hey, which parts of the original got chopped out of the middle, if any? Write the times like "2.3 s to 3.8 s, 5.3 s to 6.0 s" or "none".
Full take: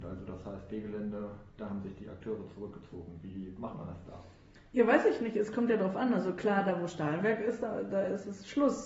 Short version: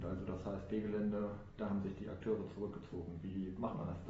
none